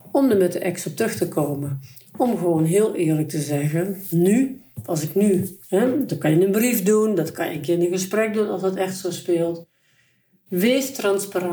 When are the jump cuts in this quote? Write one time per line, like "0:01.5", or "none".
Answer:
none

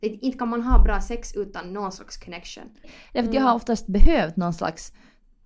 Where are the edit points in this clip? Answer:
0:02.8

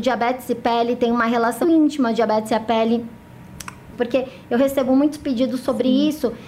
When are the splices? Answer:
0:01.6
0:03.9

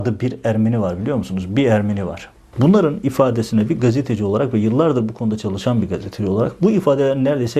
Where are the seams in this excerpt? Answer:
0:02.5

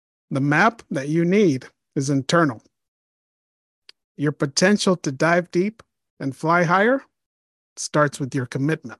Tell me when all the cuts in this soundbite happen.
none

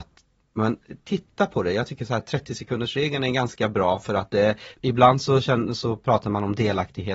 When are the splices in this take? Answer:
0:04.7

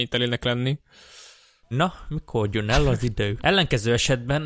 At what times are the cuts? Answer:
0:01.7
0:03.4

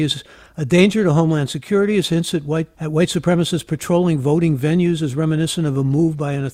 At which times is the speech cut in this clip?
0:02.7

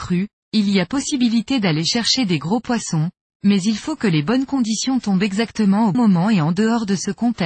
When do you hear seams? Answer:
0:05.9

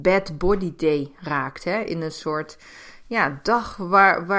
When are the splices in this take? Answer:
none

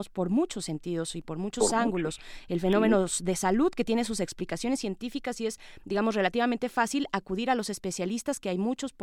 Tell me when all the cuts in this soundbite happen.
none

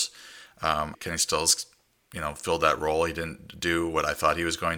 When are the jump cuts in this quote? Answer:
0:00.9

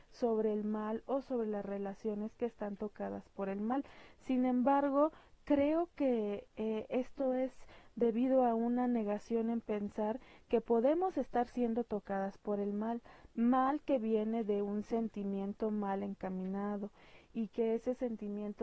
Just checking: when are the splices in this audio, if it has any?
none

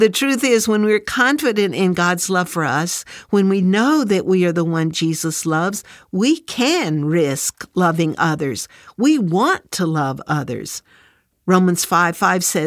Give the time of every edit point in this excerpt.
none

